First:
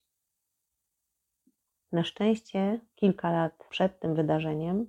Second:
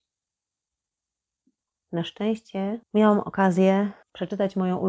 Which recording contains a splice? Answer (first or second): second